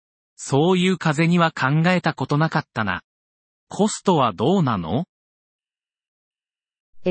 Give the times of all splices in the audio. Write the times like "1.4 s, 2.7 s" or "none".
3.5 s